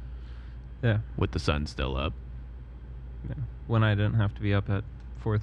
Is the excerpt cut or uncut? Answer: uncut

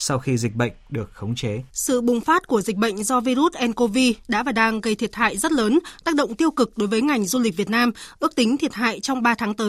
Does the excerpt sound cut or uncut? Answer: cut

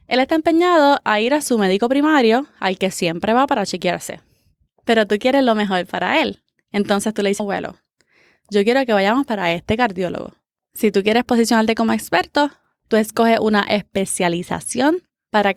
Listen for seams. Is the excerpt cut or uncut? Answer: cut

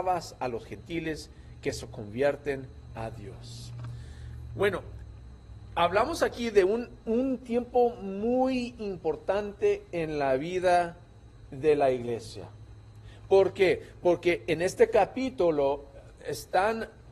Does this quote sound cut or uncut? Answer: uncut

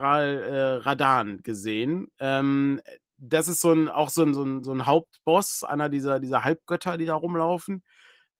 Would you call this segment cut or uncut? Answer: uncut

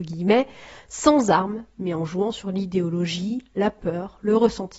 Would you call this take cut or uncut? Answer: uncut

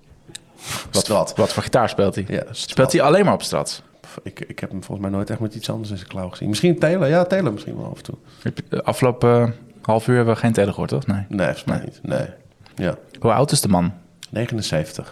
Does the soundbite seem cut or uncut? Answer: cut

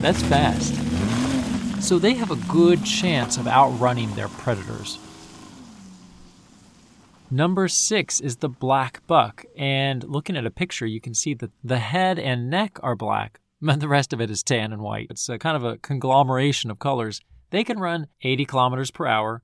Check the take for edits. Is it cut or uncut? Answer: cut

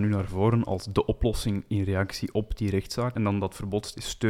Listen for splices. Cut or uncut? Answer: cut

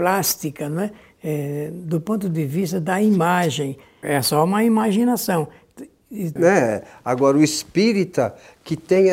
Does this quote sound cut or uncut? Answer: cut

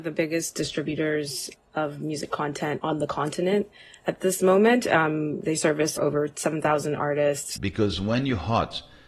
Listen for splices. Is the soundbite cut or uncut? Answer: cut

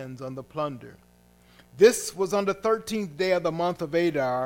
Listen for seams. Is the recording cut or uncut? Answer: uncut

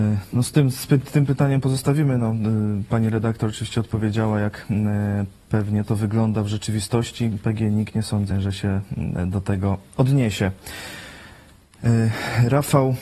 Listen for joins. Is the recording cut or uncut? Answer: cut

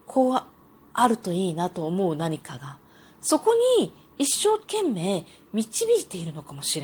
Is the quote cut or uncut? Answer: uncut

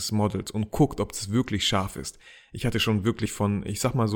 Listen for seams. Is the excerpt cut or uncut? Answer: uncut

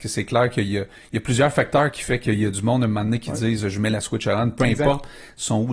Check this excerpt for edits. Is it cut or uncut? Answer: uncut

